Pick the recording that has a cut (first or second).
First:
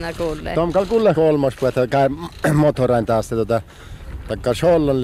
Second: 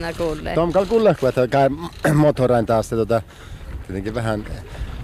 second